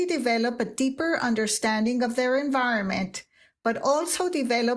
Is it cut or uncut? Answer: uncut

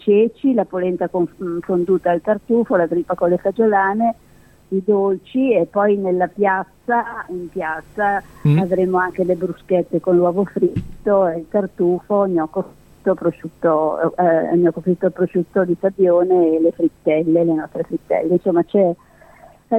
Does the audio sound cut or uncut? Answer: uncut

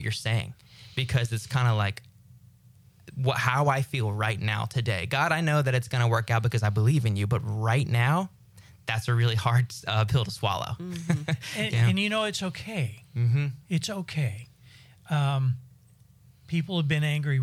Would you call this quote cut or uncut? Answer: uncut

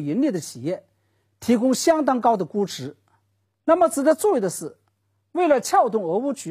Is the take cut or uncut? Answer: cut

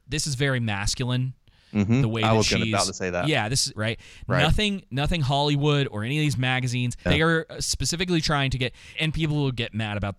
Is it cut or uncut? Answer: cut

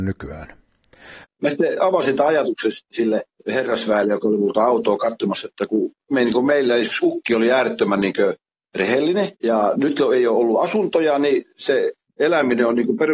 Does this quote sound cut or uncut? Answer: cut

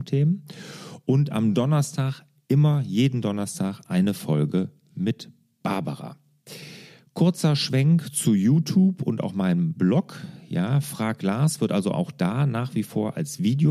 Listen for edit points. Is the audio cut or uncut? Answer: uncut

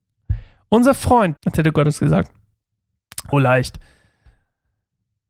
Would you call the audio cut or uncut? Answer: cut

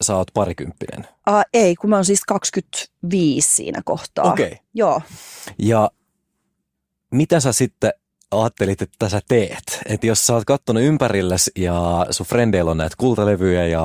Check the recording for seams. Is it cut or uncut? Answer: uncut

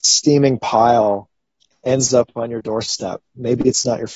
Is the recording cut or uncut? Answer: uncut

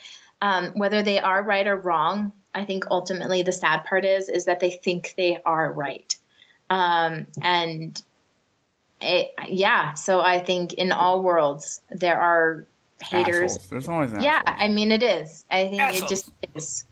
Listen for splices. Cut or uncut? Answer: uncut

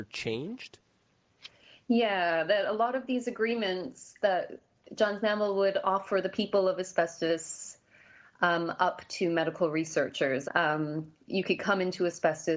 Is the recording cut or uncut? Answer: cut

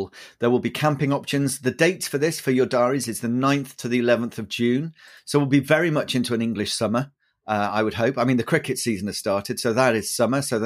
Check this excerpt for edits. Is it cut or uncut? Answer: uncut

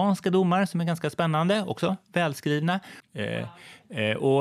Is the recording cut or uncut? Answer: cut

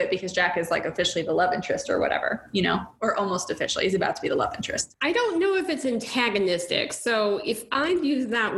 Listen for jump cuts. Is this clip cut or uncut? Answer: uncut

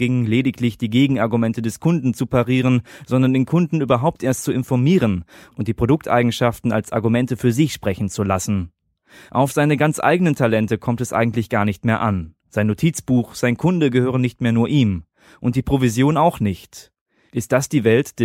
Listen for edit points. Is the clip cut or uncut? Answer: uncut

